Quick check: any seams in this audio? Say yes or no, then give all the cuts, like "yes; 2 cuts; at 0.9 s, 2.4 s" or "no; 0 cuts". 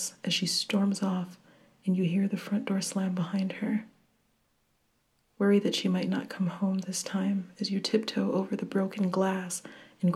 no; 0 cuts